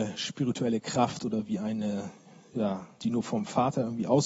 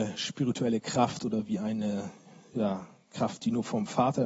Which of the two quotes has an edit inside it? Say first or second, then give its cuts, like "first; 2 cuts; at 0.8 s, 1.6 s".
first; 1 cut; at 3.0 s